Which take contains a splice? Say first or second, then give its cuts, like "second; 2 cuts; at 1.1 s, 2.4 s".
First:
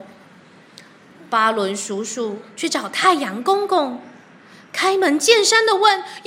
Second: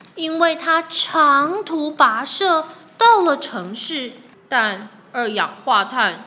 second; 1 cut; at 4.3 s